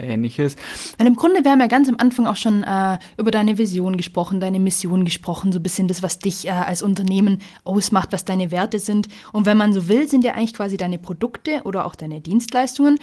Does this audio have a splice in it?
yes; 1 cut; at 1.0 s

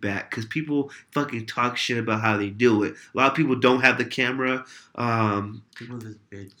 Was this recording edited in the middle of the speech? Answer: yes; 1 cut; at 5.7 s

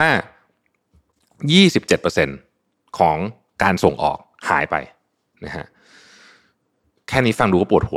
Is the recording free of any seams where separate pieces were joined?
yes; 0 cuts

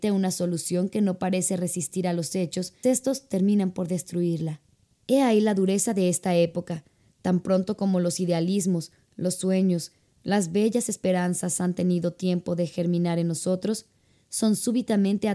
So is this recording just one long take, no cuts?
no; 1 cut; at 2.8 s

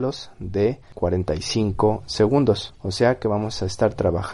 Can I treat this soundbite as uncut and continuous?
yes; 0 cuts

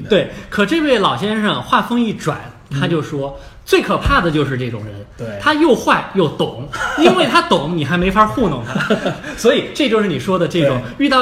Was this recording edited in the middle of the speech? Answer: no; 0 cuts

